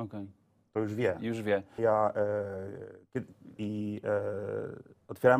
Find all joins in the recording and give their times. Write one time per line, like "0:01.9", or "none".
0:01.8
0:03.6